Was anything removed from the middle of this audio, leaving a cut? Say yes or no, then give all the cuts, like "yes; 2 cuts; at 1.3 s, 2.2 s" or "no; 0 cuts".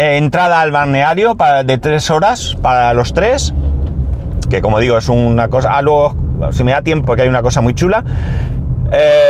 yes; 2 cuts; at 4.4 s, 7.0 s